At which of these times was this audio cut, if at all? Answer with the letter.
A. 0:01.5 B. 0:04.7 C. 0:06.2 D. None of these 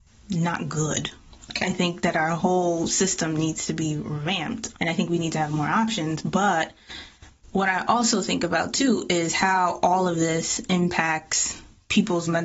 B